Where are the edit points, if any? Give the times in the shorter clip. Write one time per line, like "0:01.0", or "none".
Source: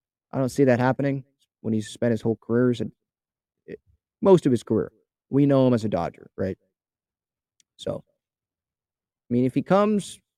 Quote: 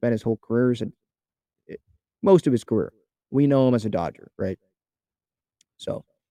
none

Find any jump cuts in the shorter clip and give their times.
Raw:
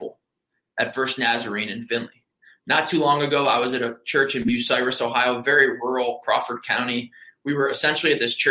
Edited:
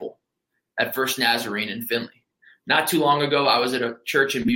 none

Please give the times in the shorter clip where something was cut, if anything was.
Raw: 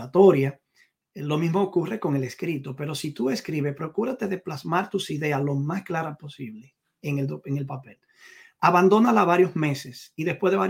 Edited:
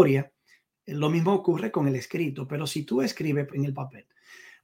0:03.5

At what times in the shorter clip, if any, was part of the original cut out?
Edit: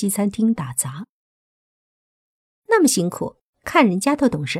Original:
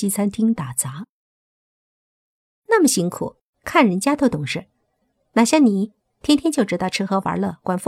none

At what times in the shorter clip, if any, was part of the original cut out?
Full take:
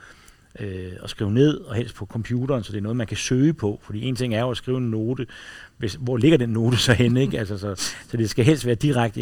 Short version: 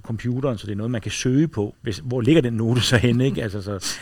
0:01.7

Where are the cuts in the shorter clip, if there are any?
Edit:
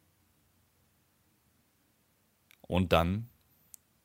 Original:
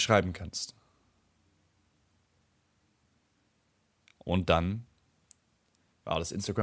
none

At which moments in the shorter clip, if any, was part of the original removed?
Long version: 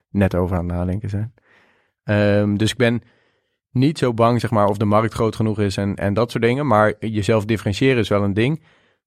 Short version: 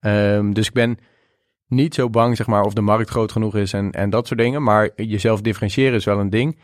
none

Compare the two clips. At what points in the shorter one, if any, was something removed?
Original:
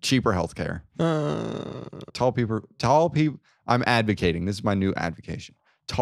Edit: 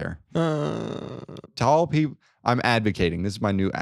0:01.5

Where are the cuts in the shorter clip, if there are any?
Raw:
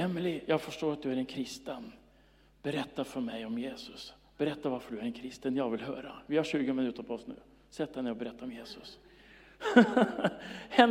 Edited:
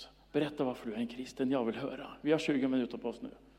none

